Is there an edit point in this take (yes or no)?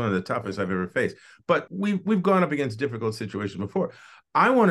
yes